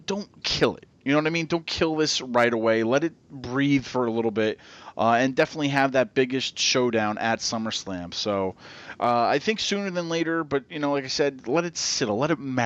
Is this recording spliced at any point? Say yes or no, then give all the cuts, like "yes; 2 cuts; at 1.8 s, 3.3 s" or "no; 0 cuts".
no; 0 cuts